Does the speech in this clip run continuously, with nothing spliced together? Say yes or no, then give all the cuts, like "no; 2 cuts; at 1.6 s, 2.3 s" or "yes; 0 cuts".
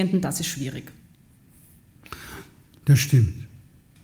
no; 1 cut; at 2.8 s